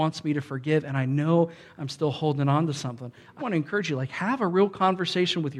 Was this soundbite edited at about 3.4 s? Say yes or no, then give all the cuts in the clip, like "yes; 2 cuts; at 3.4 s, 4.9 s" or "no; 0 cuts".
yes; 1 cut; at 3.4 s